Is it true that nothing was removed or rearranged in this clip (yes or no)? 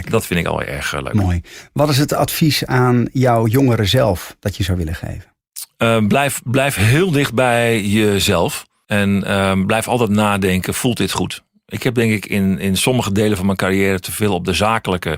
yes